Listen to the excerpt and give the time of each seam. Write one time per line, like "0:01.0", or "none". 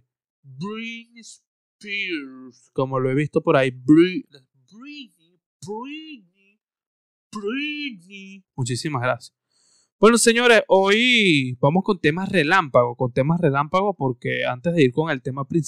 0:08.4